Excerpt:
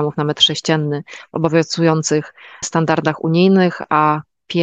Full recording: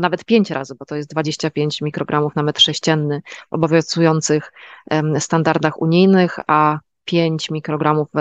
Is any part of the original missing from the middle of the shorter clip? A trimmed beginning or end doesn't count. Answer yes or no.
yes